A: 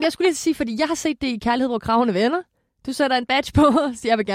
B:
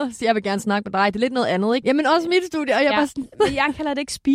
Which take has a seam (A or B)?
B